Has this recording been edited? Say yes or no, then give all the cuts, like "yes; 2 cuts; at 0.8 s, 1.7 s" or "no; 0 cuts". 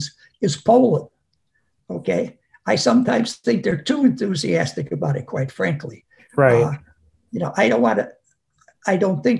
no; 0 cuts